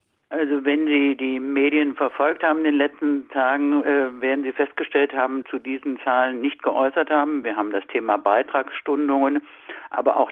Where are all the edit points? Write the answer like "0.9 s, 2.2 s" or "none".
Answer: 5.4 s, 7.4 s